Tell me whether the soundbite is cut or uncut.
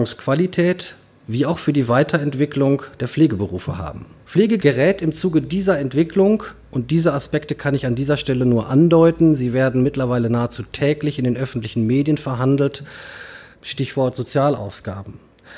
cut